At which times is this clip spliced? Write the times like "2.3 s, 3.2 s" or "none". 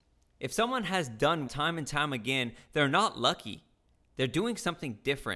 1.5 s